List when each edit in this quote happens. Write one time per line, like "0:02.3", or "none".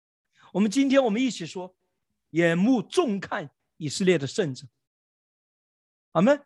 0:02.3